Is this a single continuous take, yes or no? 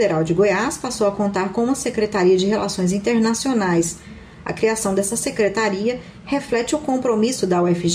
yes